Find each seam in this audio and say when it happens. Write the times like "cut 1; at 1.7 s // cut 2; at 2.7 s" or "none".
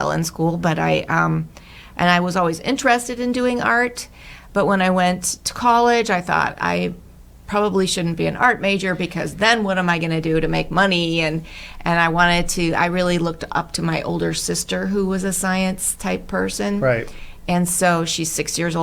none